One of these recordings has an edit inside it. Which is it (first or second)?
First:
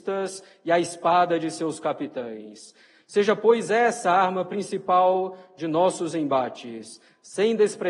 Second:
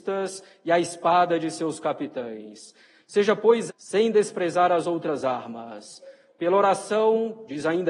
second